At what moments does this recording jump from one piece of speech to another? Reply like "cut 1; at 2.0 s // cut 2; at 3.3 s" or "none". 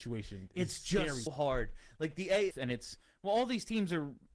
cut 1; at 1.3 s // cut 2; at 2.5 s